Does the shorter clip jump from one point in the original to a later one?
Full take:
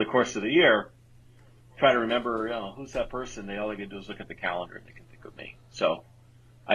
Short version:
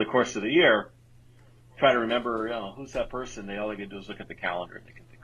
no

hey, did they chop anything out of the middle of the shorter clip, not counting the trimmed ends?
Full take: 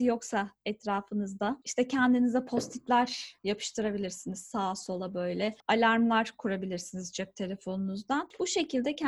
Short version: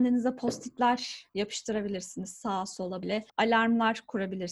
yes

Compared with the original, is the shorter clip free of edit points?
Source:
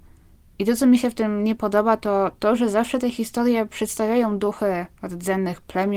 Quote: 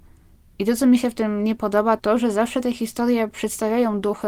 no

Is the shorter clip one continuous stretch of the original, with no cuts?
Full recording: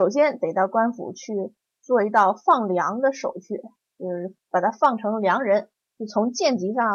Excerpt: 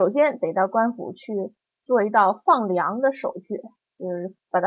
yes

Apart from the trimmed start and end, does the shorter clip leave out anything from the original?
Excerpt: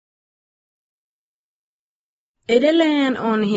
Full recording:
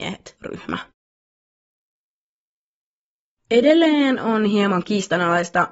no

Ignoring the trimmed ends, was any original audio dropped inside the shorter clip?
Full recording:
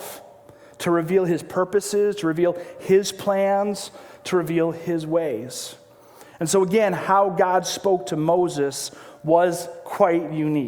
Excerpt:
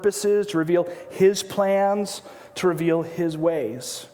no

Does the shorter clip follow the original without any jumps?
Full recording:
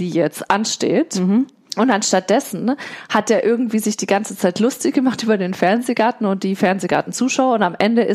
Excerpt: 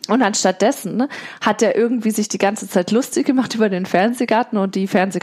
yes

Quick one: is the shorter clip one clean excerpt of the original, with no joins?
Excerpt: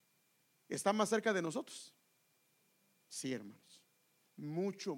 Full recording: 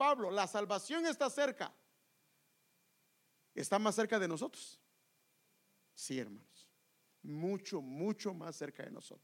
yes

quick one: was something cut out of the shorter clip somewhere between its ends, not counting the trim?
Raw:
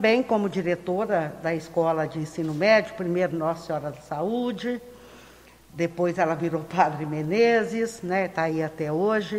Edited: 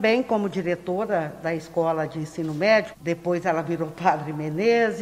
yes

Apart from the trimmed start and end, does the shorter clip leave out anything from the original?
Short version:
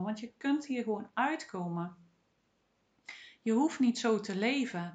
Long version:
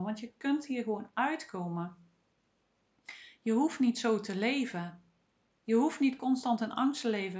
no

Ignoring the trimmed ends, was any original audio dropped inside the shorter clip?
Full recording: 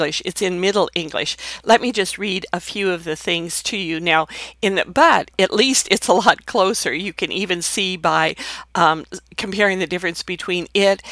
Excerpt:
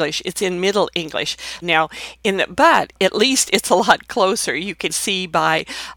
yes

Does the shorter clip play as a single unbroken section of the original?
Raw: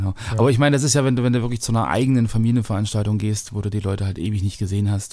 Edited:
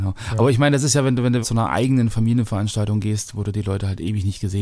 no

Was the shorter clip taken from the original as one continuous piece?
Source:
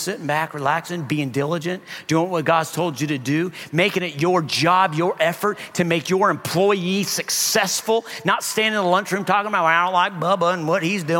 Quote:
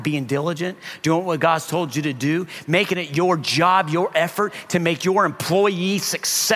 yes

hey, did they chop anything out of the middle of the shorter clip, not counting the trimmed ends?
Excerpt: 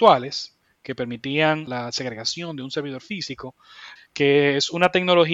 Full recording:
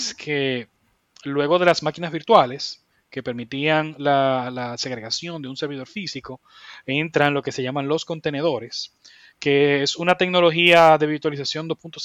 yes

